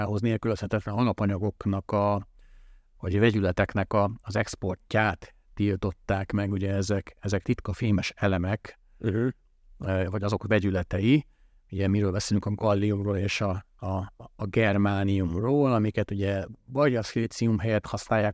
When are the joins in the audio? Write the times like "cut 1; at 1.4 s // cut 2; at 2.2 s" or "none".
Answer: cut 1; at 7.4 s